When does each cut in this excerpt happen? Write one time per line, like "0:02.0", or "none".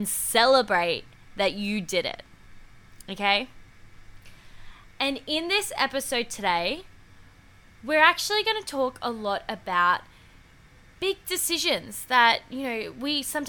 none